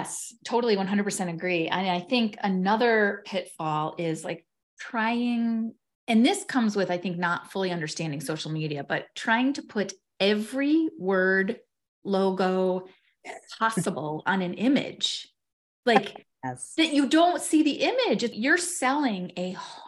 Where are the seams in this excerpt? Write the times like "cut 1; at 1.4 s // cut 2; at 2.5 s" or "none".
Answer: cut 1; at 18.3 s